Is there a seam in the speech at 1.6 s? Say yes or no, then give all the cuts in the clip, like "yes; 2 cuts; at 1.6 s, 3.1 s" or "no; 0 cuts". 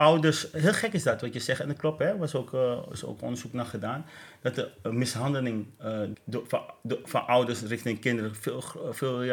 no; 1 cut; at 6.1 s